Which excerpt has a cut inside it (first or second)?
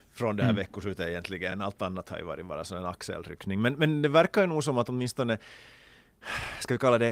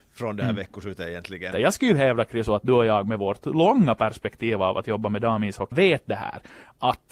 second